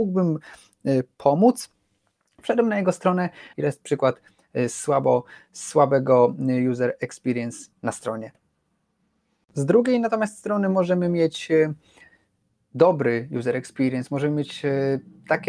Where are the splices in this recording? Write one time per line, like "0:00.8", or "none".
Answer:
0:03.5